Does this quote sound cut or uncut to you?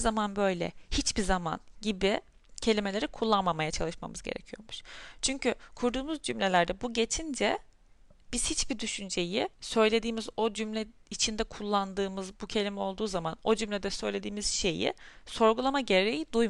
cut